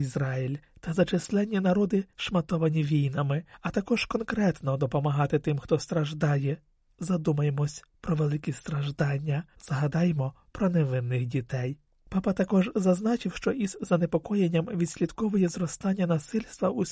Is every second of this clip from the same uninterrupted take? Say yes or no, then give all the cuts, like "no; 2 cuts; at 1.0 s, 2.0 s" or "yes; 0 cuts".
no; 1 cut; at 9.5 s